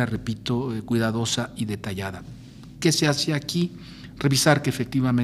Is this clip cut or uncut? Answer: uncut